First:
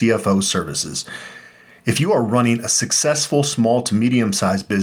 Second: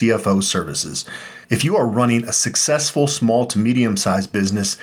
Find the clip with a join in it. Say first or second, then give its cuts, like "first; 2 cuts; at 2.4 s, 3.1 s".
second; 1 cut; at 1.4 s